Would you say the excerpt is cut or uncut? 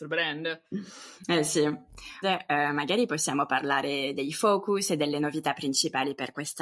cut